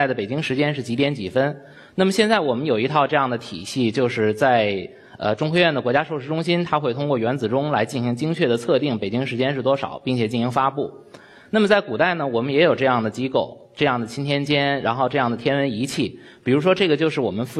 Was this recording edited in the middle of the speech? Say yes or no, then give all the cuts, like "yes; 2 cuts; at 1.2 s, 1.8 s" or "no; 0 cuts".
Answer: no; 0 cuts